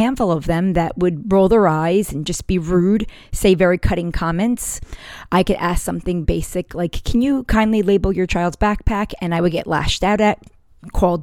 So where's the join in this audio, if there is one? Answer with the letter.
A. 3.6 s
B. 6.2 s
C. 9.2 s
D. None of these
B